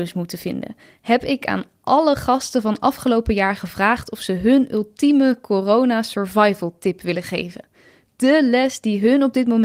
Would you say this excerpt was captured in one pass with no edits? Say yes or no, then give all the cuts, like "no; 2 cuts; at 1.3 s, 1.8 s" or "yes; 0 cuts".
yes; 0 cuts